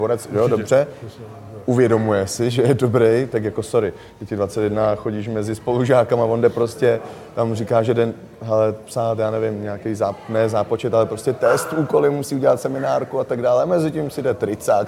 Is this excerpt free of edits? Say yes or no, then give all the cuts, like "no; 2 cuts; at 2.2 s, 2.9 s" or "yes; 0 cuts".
yes; 0 cuts